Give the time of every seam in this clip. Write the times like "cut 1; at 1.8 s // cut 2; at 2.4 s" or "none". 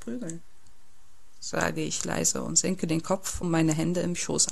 cut 1; at 3.4 s